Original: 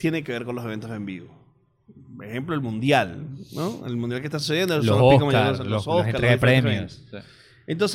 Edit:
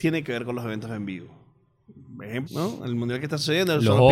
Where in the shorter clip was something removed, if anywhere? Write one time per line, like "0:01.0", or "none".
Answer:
0:02.5